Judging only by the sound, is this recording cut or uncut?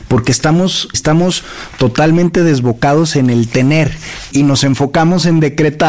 cut